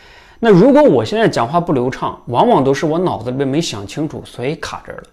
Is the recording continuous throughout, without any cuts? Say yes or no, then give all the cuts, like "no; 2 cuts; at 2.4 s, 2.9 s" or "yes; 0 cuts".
yes; 0 cuts